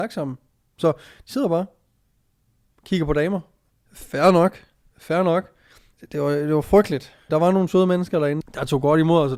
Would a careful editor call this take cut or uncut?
cut